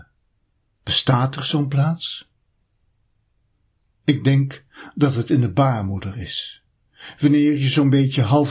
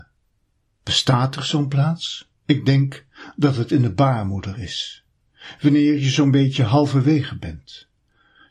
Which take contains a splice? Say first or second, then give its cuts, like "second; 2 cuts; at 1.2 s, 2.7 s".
second; 1 cut; at 2.4 s